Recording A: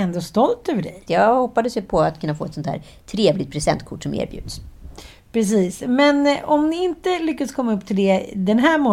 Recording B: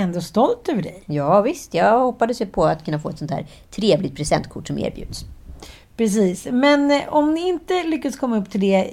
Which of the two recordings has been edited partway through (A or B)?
A